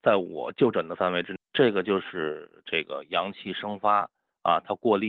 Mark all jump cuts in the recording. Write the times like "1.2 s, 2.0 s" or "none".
1.4 s

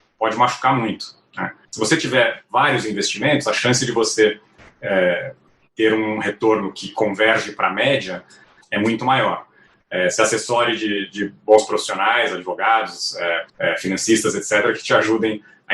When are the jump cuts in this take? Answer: 1.6 s, 9.7 s, 13.5 s

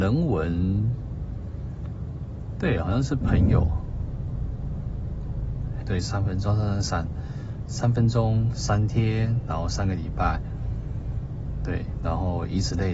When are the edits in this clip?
5.8 s, 8.5 s

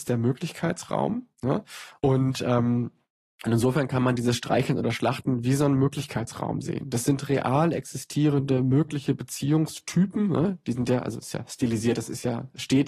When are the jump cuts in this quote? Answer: 2.0 s

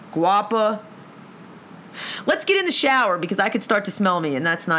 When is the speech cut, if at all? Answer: 1.9 s

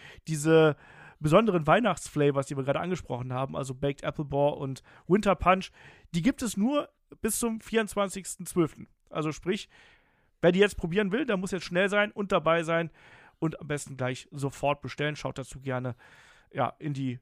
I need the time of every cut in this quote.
none

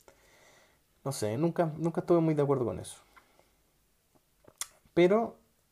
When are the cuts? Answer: 1.4 s

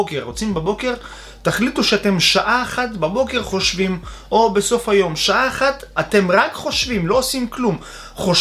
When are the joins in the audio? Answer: none

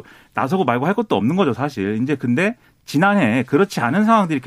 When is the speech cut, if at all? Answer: none

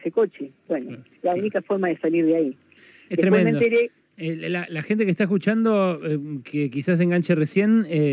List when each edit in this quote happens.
none

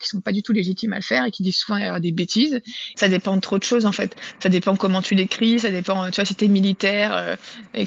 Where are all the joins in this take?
2.9 s

